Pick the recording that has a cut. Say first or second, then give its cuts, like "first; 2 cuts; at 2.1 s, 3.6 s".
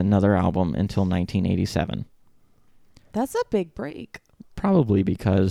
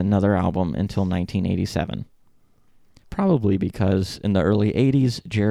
second; 1 cut; at 3.0 s